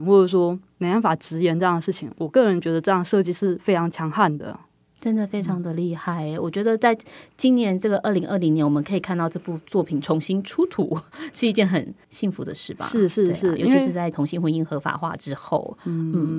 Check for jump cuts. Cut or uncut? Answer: uncut